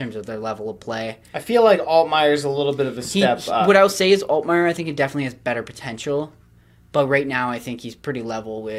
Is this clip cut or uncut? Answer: uncut